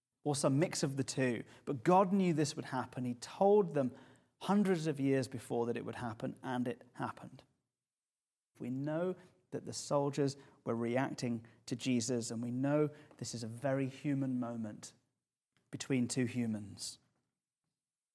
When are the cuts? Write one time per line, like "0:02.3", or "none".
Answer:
0:08.5